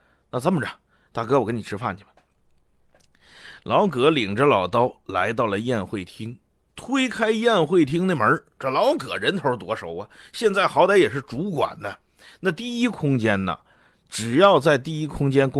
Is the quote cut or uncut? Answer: uncut